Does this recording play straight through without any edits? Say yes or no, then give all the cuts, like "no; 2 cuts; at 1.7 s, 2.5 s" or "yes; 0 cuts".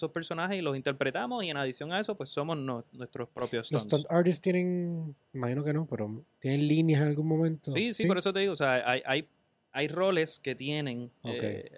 yes; 0 cuts